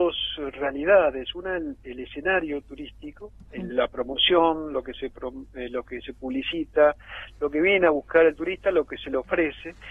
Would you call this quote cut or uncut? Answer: uncut